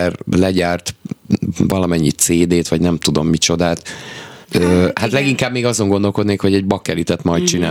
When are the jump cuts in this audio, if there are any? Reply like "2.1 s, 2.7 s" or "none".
4.4 s